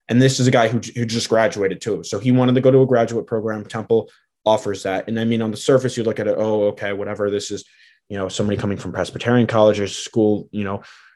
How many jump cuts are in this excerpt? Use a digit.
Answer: 0